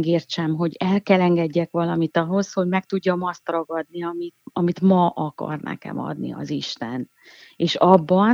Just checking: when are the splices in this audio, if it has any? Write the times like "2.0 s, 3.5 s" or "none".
4.4 s